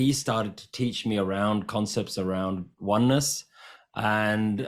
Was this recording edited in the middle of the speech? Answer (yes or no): no